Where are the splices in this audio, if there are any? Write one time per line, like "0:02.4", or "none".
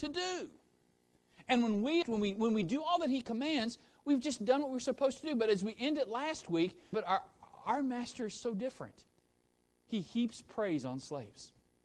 0:02.0
0:06.9